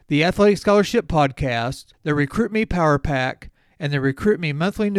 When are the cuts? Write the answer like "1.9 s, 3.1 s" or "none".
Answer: none